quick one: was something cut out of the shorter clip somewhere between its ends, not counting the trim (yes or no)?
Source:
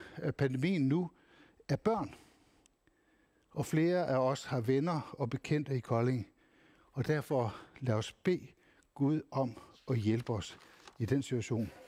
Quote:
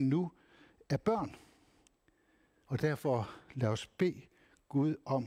yes